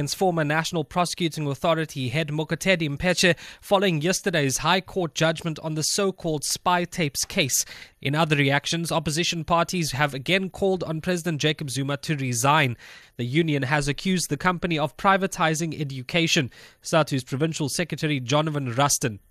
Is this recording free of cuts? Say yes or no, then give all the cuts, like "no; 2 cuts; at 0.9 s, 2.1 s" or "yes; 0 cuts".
no; 2 cuts; at 7.9 s, 13.0 s